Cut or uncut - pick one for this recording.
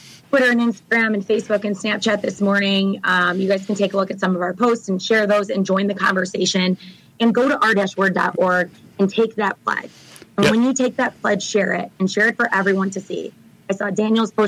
uncut